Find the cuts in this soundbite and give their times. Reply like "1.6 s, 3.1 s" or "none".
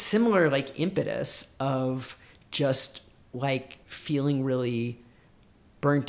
3.8 s